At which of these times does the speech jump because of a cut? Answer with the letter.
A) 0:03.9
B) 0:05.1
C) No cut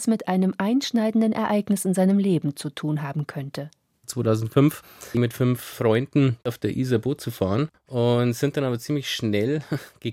B